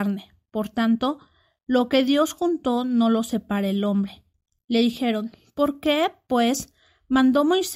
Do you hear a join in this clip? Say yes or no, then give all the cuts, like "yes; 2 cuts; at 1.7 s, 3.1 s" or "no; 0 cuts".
no; 0 cuts